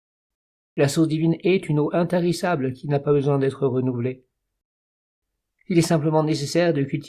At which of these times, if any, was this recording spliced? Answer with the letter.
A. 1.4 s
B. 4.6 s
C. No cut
C